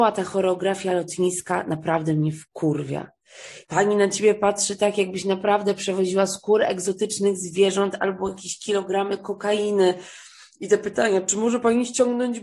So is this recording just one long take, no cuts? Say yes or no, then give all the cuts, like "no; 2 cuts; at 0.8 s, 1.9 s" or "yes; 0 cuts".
no; 1 cut; at 3.6 s